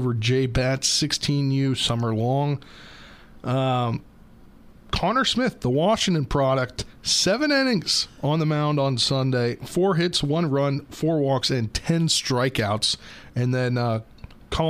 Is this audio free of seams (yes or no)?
yes